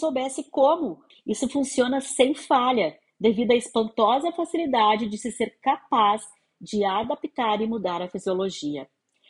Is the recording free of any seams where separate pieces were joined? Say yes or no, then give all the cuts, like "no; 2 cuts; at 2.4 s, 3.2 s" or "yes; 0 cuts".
no; 1 cut; at 1.1 s